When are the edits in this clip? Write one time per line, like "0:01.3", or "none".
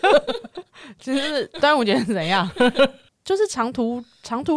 0:03.1